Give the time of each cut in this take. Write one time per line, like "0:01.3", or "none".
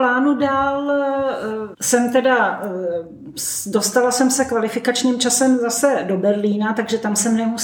0:01.7

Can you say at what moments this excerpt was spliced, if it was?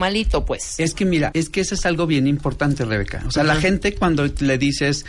0:01.3

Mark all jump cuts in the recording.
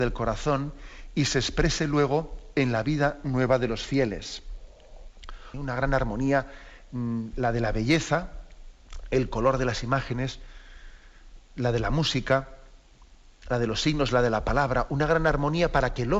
0:05.5

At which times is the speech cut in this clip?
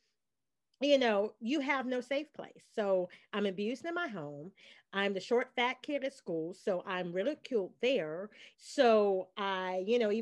0:08.5

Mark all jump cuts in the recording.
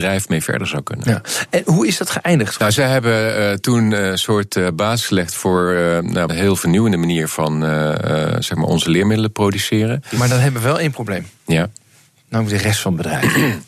0:02.6
0:06.3

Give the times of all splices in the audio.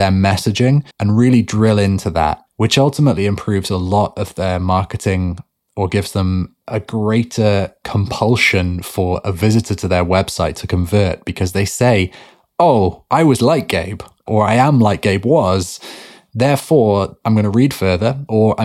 0:00.9
0:02.5

